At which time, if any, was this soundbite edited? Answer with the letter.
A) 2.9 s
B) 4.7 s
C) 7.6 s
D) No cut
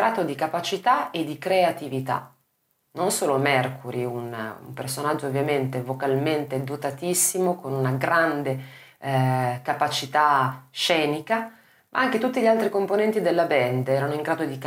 A